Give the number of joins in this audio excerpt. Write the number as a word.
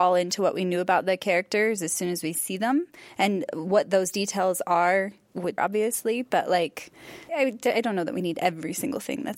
two